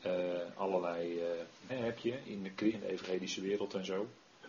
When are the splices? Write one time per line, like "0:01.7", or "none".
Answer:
0:01.7
0:02.7